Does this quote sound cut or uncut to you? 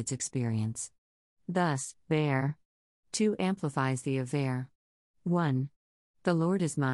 uncut